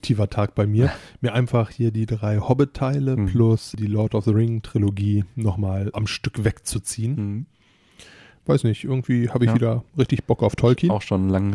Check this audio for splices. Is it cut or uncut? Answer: cut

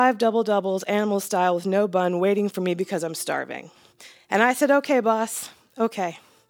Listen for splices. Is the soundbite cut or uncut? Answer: uncut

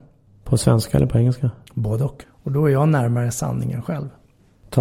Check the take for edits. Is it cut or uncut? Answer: cut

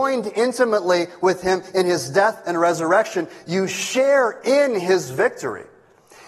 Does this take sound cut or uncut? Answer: uncut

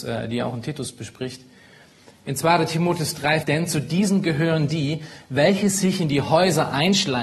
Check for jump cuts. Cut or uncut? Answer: cut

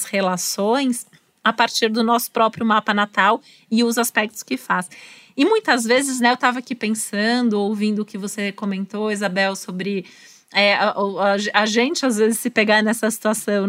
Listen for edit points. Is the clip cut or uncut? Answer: uncut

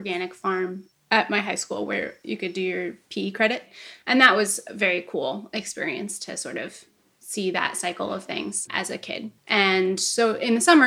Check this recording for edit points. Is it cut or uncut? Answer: cut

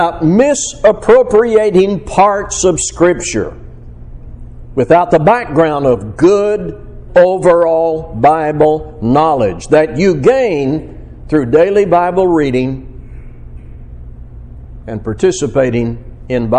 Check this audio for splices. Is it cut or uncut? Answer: cut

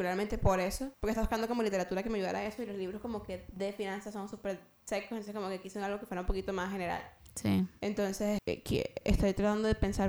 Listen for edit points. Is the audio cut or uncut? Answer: cut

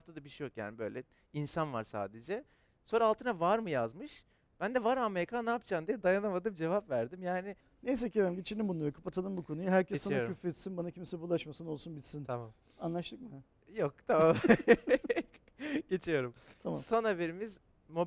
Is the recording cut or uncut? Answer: uncut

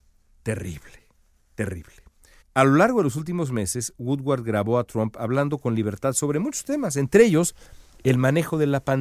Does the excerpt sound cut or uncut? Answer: cut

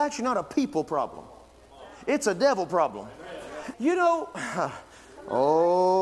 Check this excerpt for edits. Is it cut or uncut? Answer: cut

